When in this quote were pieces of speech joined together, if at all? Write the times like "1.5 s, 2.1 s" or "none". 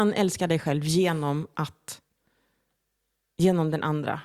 none